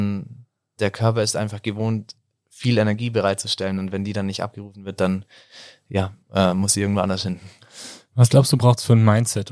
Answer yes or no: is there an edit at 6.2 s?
yes